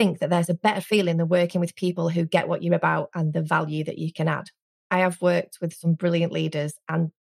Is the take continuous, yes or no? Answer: yes